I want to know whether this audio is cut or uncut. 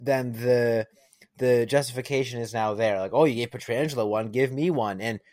uncut